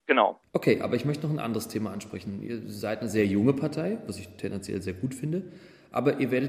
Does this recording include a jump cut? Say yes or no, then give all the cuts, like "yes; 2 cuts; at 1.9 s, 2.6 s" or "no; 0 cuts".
no; 0 cuts